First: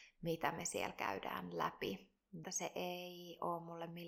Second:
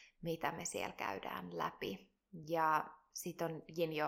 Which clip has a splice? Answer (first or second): first